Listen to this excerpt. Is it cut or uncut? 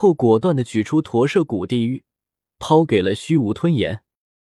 uncut